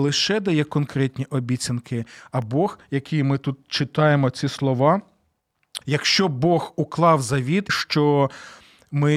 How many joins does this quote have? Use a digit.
2